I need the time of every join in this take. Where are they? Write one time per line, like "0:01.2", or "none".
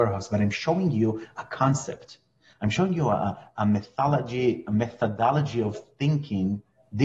none